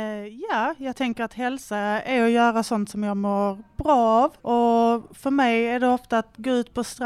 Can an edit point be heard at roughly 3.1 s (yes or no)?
no